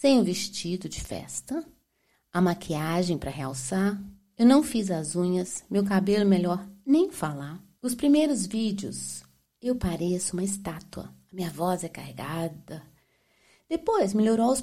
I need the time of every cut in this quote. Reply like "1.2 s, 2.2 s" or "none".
7.8 s